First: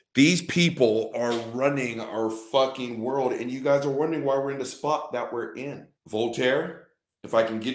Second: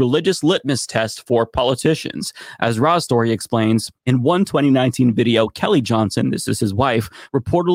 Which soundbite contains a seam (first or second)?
first